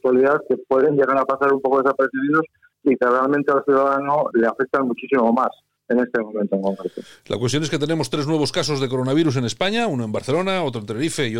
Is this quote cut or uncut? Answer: cut